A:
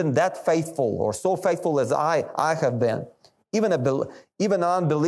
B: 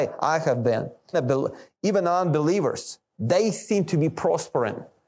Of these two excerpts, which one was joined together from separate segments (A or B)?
B